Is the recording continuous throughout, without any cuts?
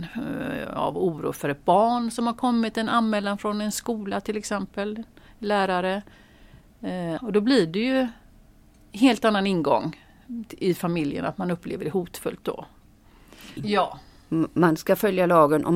no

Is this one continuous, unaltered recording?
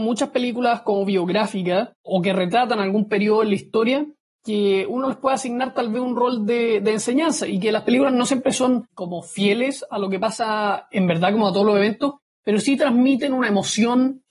yes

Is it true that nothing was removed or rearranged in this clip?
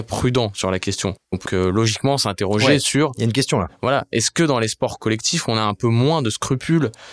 no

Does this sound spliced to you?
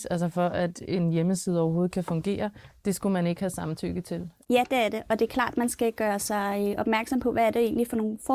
yes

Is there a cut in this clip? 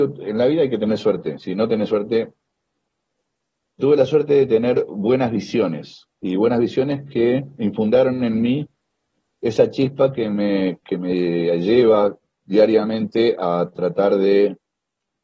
yes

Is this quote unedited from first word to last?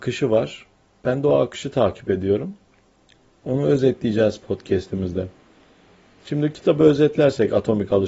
yes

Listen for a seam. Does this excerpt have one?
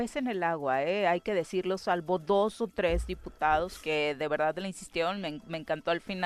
no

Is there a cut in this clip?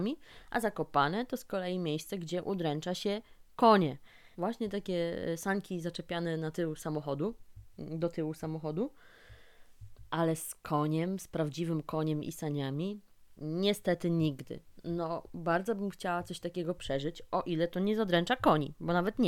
yes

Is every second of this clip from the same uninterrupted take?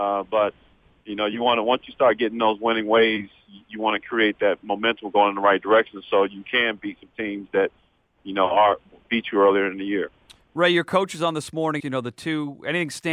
no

